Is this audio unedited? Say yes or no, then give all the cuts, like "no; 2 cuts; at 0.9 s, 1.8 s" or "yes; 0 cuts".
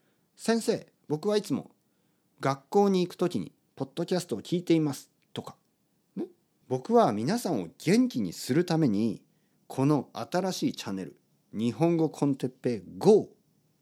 no; 1 cut; at 6.6 s